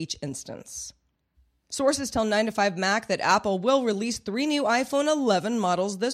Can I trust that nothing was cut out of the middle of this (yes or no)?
yes